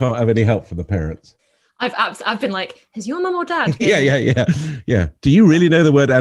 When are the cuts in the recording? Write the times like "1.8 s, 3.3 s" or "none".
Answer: none